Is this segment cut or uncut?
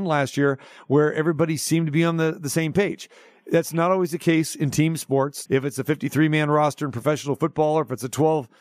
cut